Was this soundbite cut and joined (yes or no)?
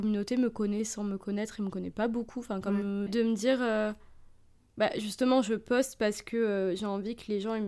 yes